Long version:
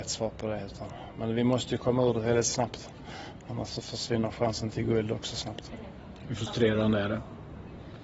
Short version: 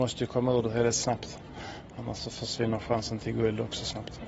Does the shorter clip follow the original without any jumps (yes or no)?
yes